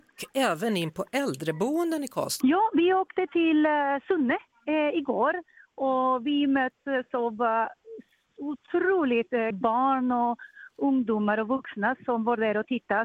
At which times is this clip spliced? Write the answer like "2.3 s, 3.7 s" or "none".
2.4 s, 9.5 s